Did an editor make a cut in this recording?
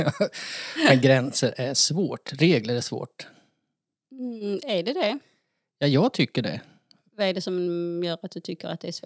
no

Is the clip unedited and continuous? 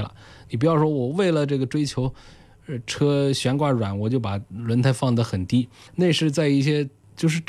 yes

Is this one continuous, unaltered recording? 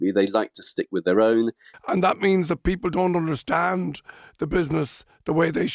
no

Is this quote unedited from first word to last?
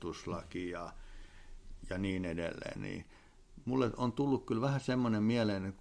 yes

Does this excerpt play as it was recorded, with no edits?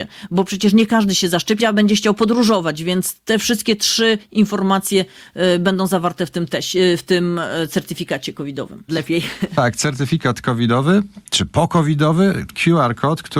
no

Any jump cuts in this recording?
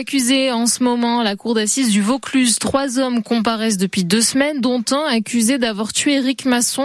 no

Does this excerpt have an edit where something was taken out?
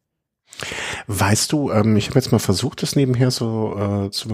no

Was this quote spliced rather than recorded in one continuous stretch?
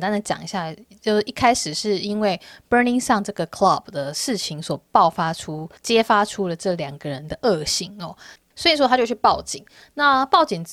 yes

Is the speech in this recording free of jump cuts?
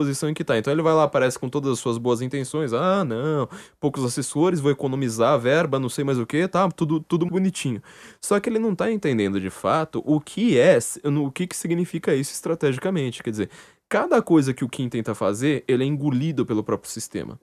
no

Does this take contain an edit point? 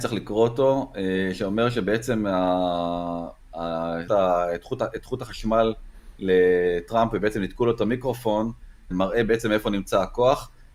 yes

